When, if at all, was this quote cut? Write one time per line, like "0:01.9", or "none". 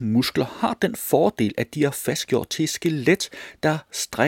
none

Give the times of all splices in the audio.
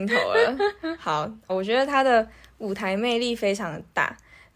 0:01.5

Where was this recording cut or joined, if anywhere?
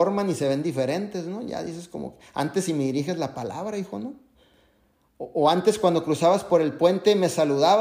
none

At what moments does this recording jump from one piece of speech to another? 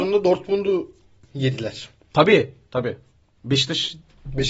none

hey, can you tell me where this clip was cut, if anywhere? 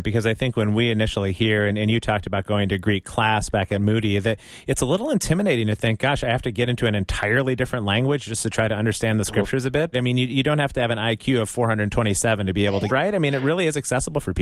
0:09.9
0:12.9

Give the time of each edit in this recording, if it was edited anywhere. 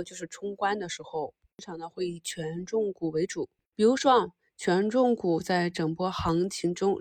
0:03.6

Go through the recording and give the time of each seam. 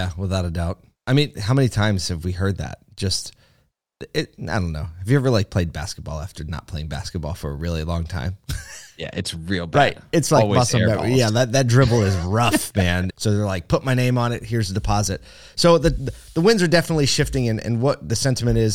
0:13.1

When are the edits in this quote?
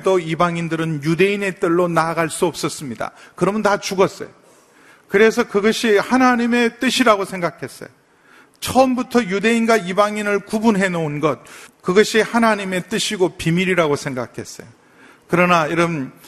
0:11.7

